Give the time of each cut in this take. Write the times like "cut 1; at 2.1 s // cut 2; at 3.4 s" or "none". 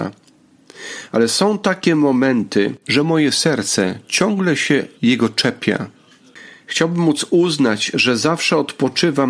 cut 1; at 2.8 s // cut 2; at 5.0 s